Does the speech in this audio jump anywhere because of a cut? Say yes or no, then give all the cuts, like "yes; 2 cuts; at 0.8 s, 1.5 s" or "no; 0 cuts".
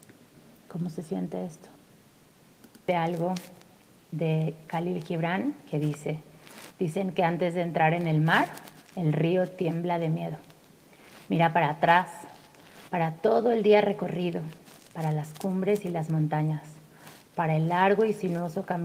no; 0 cuts